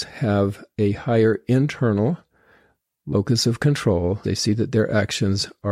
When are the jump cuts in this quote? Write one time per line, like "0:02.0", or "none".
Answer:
0:04.2

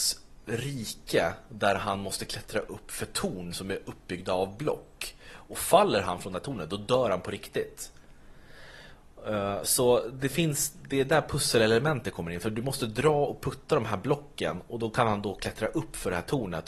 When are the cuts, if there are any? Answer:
none

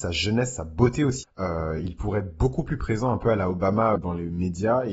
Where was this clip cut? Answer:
0:01.2
0:04.0

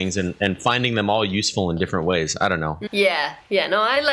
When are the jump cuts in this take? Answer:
0:02.9

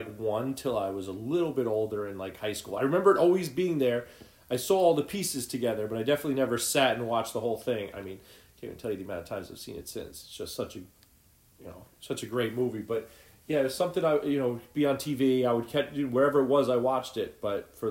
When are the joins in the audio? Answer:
none

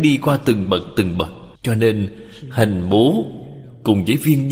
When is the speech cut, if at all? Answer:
0:01.5

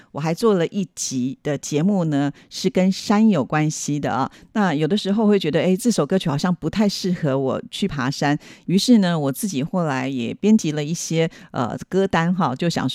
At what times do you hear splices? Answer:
0:04.5

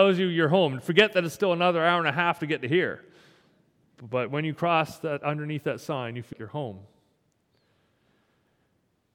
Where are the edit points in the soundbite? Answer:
0:06.3

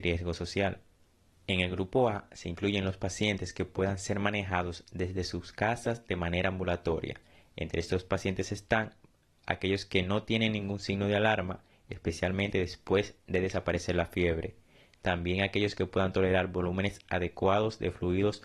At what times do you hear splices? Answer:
0:01.3

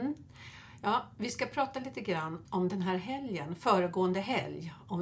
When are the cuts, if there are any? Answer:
0:02.4

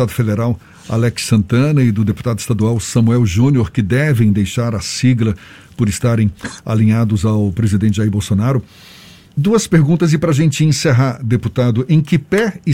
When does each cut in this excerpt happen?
0:09.3

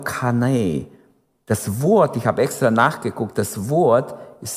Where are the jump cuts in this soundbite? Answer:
none

